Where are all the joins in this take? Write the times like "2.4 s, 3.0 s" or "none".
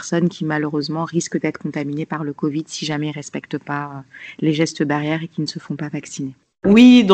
none